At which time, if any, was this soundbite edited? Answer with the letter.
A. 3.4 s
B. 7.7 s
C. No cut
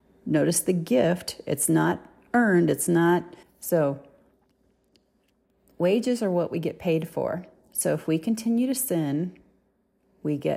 A